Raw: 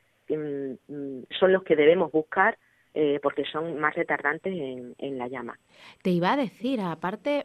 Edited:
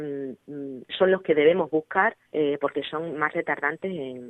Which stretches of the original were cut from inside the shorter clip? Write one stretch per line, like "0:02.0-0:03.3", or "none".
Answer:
0:02.7-0:02.9